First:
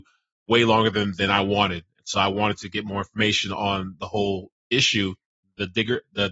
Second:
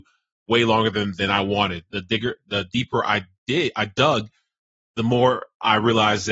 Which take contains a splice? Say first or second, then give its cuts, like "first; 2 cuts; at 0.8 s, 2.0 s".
second; 1 cut; at 1.9 s